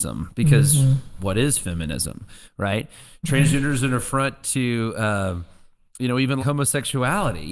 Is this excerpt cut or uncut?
cut